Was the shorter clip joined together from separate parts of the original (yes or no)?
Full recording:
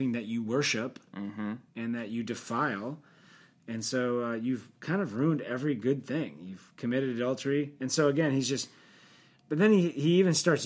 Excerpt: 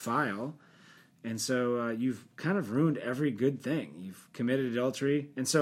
no